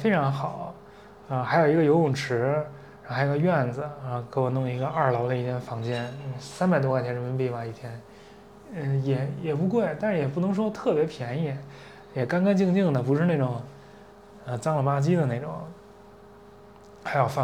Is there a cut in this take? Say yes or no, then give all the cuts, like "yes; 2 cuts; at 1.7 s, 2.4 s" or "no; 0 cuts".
no; 0 cuts